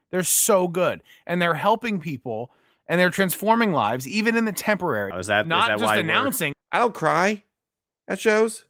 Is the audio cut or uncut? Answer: cut